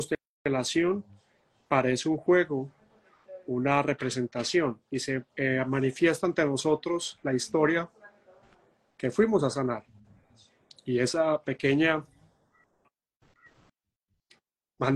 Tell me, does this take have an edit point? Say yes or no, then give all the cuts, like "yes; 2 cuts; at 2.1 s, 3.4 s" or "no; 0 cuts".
no; 0 cuts